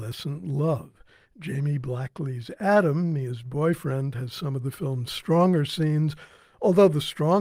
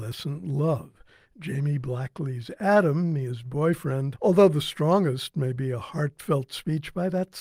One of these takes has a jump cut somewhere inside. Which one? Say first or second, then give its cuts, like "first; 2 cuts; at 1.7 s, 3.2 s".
second; 1 cut; at 4.1 s